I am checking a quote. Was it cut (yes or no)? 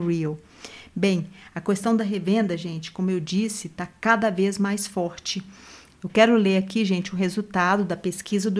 no